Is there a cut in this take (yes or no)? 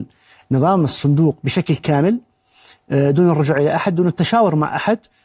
no